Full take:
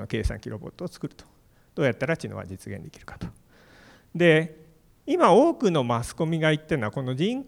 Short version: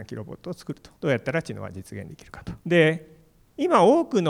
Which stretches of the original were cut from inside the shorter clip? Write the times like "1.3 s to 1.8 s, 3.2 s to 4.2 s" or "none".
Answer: 1.3 s to 1.7 s, 3.3 s to 4.1 s